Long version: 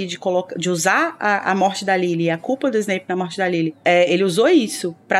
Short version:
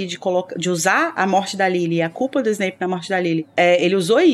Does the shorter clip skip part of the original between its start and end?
yes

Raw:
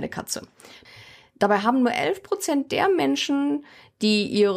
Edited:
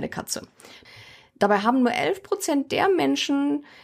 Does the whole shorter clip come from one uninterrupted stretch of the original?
yes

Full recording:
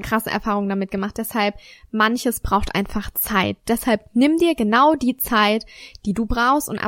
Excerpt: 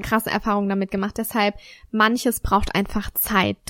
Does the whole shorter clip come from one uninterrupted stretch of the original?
yes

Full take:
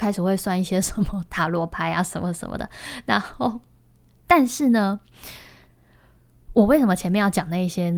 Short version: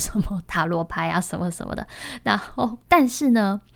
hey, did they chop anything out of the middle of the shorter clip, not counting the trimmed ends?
yes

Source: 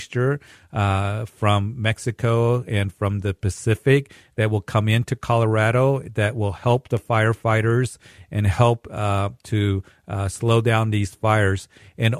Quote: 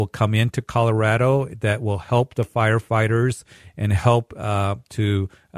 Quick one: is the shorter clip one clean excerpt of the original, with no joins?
yes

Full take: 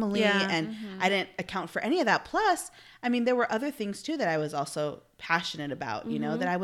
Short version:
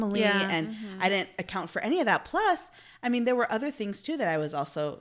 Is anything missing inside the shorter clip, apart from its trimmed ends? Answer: no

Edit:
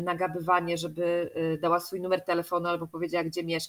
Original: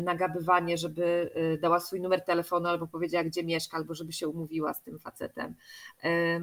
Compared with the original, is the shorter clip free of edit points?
yes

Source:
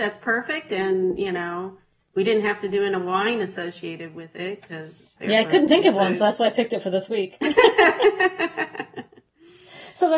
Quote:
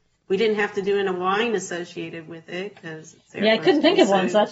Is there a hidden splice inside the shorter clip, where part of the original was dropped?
no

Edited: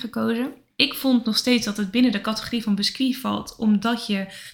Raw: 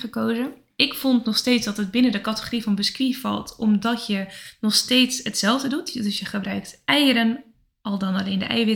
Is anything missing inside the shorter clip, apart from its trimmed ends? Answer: no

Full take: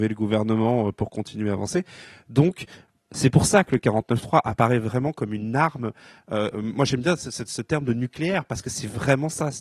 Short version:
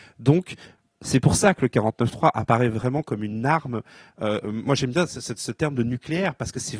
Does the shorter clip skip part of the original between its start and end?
no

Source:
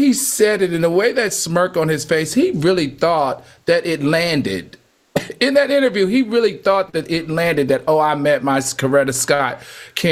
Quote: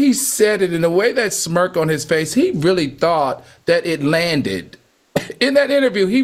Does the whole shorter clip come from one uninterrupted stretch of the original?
yes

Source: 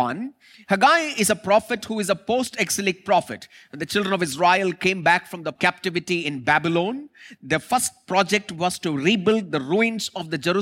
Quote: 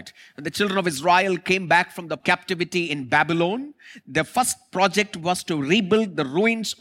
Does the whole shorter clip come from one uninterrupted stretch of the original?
yes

